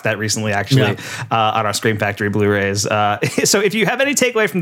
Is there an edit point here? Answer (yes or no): no